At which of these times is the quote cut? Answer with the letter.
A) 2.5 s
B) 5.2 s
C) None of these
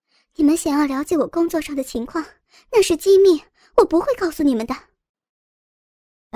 C